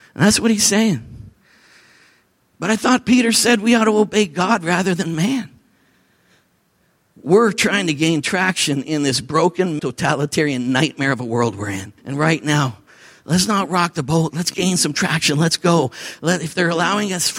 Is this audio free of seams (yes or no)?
no